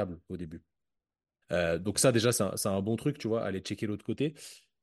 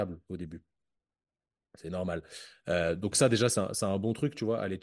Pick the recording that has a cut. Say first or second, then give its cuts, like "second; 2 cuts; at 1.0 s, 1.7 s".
first; 1 cut; at 1.4 s